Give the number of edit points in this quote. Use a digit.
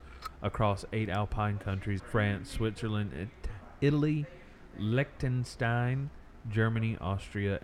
1